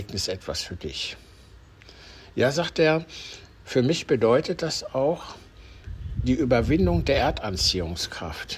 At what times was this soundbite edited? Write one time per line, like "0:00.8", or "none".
none